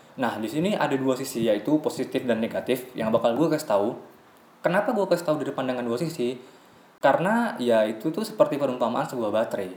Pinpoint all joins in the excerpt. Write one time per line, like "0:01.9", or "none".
none